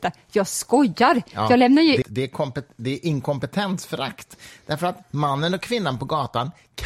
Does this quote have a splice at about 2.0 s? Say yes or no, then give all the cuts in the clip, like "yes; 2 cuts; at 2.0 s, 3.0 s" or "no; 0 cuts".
yes; 1 cut; at 2.0 s